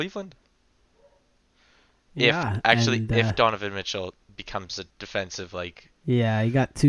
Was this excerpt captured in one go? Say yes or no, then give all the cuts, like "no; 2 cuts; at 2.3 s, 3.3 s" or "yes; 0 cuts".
no; 1 cut; at 4.9 s